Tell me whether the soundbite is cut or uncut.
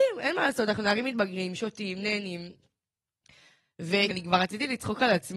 cut